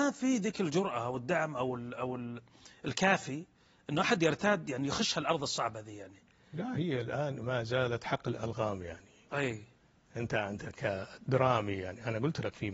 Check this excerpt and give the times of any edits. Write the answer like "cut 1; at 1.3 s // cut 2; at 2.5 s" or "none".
cut 1; at 6.7 s